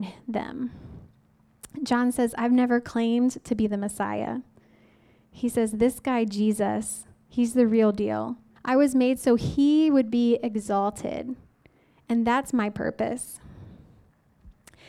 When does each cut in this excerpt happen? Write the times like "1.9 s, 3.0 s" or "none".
8.6 s